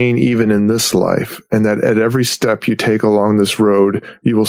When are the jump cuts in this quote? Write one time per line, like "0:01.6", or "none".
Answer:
none